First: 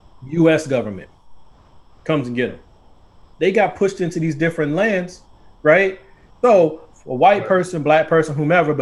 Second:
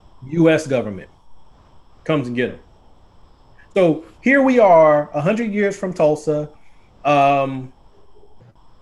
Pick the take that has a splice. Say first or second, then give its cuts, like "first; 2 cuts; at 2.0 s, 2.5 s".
first; 2 cuts; at 3.3 s, 6.3 s